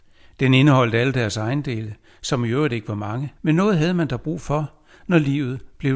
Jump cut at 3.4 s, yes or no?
yes